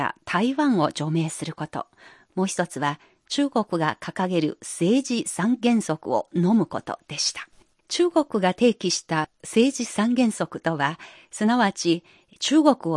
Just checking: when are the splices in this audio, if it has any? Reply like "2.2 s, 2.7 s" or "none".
none

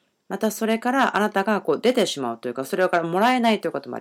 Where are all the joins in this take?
none

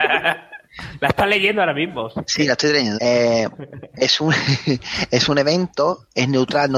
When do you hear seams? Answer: 3.0 s

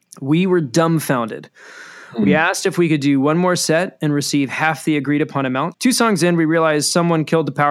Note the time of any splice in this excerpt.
5.7 s

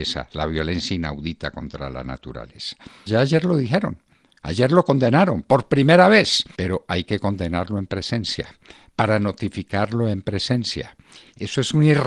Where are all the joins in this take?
3.1 s, 6.5 s

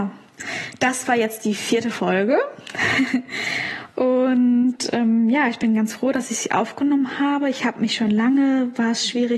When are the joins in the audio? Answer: none

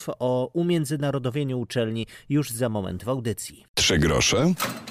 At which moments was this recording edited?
3.7 s

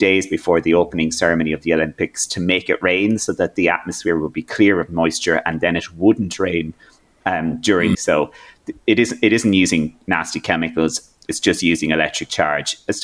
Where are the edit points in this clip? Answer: 7.9 s

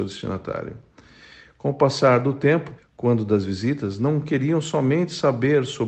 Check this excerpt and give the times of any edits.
2.8 s

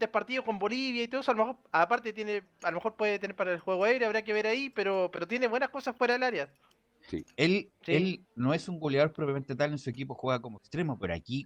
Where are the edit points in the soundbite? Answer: none

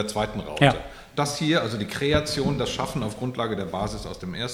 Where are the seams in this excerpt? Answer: none

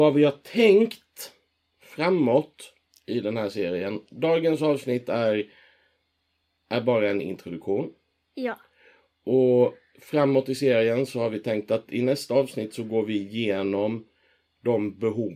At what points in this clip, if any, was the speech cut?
none

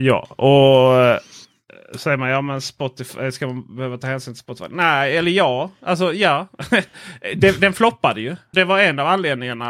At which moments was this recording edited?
8.5 s

